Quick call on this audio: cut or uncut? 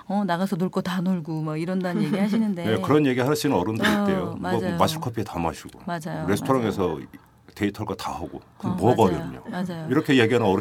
uncut